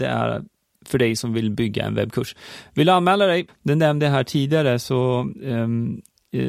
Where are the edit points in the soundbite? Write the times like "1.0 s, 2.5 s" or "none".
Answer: 3.5 s